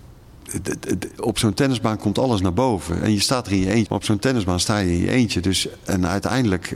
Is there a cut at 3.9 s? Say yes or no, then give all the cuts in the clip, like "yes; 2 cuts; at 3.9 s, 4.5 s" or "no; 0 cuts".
yes; 1 cut; at 3.9 s